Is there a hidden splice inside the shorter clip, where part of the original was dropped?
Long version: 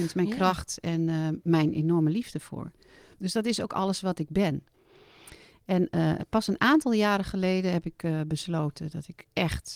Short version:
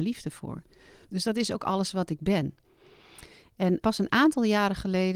yes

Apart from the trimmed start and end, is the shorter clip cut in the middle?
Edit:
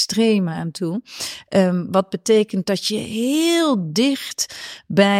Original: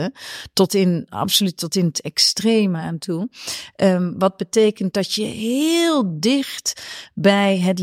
no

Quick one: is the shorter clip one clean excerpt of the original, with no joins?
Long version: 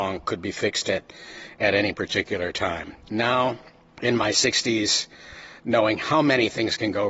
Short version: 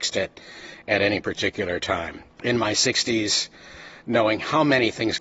no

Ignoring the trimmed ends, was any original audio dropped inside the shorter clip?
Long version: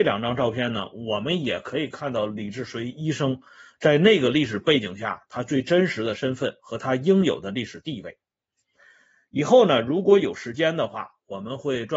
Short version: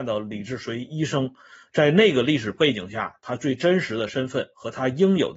no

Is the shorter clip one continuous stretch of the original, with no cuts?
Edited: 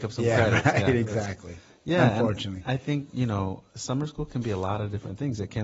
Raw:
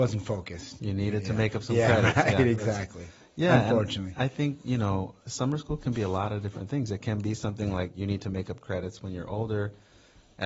yes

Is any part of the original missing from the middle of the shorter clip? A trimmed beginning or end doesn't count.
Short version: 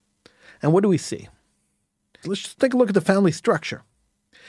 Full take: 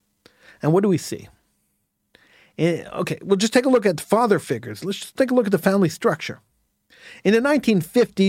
yes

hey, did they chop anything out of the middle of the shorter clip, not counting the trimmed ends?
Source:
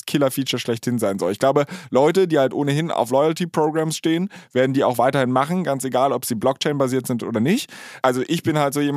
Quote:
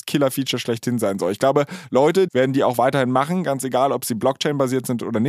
yes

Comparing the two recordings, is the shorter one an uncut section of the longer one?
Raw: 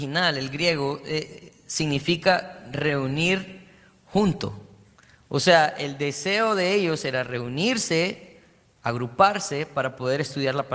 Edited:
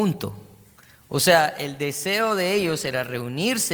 yes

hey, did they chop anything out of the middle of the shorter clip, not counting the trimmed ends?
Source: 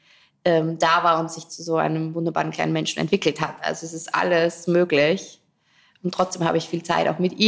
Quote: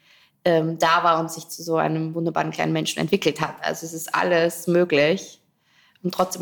no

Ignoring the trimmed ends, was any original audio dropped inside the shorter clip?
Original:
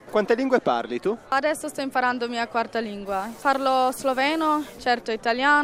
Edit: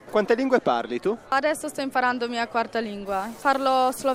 no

